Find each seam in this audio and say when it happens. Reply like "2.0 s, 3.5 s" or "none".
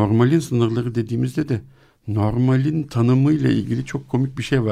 none